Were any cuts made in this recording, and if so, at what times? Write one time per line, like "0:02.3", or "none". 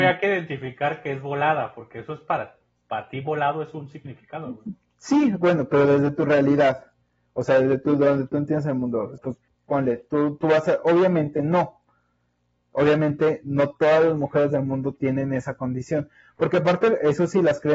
0:09.2